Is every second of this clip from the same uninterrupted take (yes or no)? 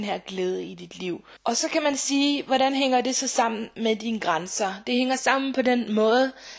no